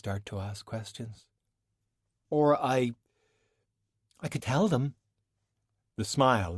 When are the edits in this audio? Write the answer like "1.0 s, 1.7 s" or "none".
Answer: 4.4 s